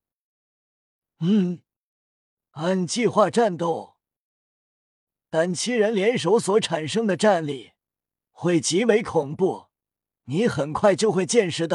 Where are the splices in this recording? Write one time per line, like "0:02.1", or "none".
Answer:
0:05.1